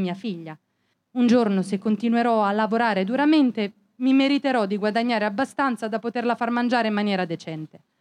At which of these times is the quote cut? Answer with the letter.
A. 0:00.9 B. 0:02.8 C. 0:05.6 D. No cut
A